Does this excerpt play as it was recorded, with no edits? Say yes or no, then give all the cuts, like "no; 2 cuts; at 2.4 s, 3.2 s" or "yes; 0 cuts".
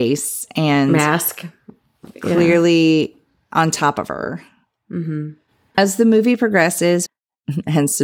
no; 2 cuts; at 5.7 s, 7.1 s